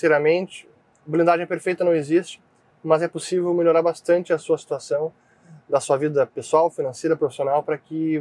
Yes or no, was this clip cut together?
no